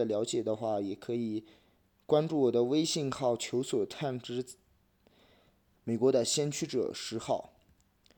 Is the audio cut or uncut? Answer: cut